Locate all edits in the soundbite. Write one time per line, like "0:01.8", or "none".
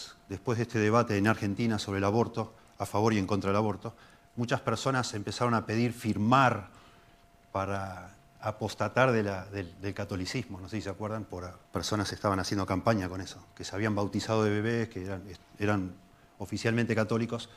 0:11.6